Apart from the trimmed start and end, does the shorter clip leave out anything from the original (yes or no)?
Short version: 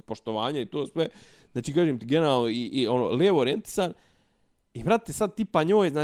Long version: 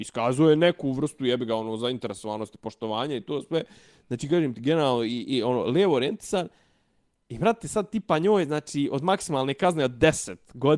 no